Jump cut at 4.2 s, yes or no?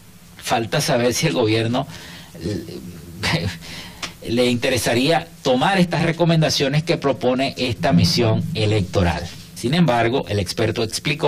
yes